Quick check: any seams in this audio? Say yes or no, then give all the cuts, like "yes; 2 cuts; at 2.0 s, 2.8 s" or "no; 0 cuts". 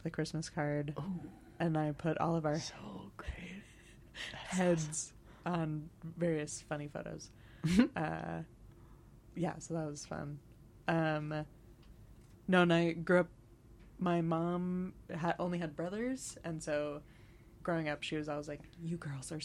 no; 0 cuts